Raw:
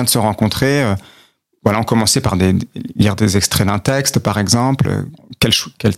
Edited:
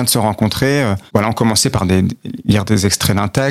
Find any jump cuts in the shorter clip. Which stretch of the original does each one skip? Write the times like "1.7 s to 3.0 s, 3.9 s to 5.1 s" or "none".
1.1 s to 1.6 s